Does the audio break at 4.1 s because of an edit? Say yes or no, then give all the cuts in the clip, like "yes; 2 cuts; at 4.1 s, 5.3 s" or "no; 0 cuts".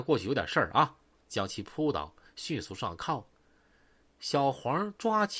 no; 1 cut; at 1.2 s